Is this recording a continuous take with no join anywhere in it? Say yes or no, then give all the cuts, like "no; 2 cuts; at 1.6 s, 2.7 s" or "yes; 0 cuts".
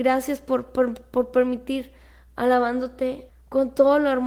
no; 1 cut; at 3.3 s